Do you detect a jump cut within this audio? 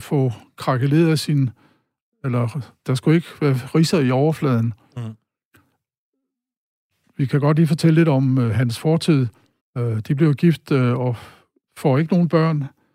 yes; 1 cut; at 9.6 s

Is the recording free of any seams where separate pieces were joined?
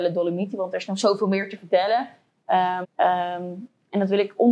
no; 1 cut; at 2.8 s

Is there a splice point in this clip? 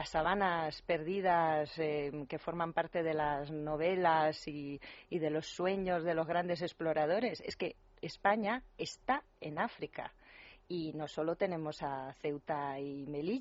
no; 0 cuts

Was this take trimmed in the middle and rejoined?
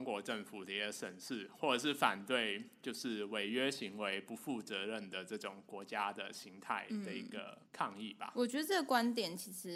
yes; 1 cut; at 7.7 s

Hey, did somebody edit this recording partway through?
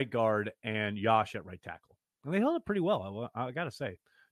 no; 0 cuts

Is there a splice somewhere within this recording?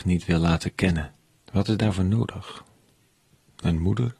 yes; 1 cut; at 1.4 s

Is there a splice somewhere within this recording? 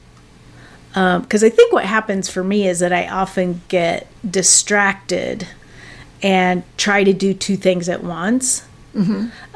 yes; 1 cut; at 4.2 s

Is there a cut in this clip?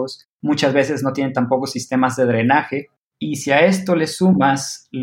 no; 0 cuts

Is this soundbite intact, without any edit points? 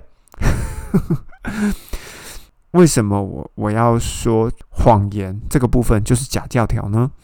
yes; 0 cuts

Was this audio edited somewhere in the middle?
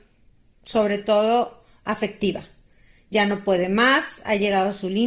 no; 0 cuts

